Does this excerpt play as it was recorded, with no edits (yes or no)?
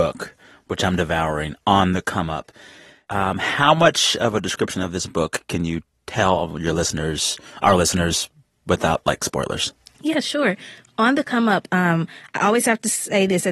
yes